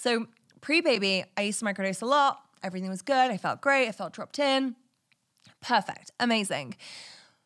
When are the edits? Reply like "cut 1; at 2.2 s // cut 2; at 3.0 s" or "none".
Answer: none